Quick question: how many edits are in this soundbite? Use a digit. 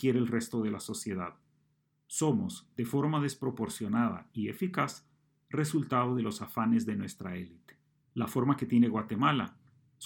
1